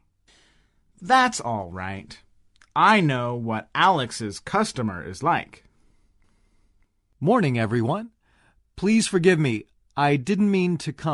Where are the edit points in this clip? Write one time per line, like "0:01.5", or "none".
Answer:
none